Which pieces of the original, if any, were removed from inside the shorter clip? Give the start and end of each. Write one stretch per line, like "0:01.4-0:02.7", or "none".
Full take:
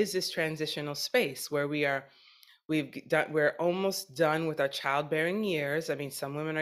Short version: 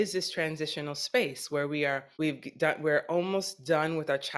0:02.1-0:02.6